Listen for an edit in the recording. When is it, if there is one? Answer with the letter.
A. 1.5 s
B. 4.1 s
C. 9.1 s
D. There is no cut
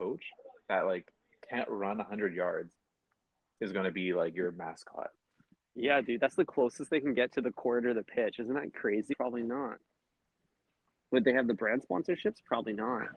C